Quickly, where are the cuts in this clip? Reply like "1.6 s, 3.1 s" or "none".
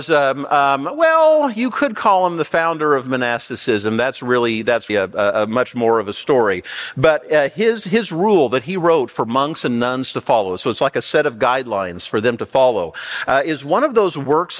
4.9 s